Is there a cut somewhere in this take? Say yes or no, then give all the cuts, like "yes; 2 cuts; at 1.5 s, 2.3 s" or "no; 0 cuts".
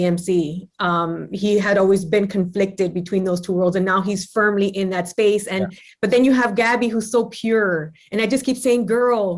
no; 0 cuts